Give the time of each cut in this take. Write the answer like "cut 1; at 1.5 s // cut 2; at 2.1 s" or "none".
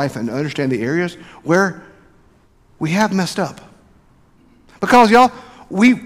none